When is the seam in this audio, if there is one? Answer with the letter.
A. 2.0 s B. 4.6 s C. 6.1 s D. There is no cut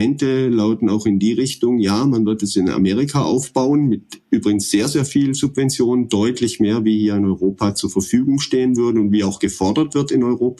D